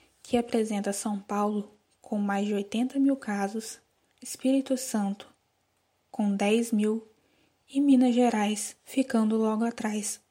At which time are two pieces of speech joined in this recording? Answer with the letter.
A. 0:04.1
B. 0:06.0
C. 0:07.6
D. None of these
A